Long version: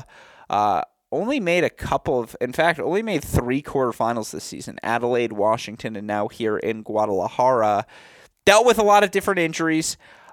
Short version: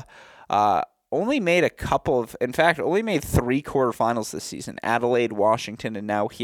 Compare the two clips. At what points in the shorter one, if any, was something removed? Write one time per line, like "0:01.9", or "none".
none